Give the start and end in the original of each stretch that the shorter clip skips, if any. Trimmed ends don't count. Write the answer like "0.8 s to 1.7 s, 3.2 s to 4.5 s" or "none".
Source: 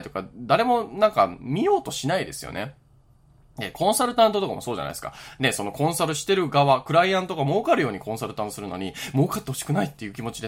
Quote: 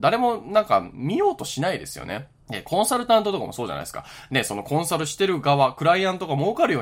2.9 s to 3.5 s